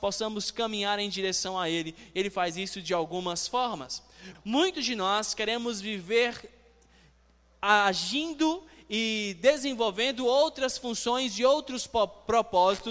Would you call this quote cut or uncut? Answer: cut